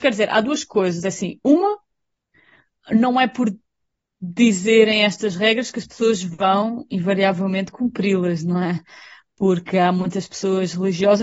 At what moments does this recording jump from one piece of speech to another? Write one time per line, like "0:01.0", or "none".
none